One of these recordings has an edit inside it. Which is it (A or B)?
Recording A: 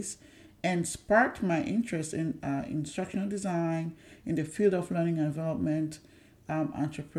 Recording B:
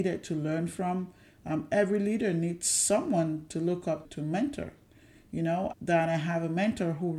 B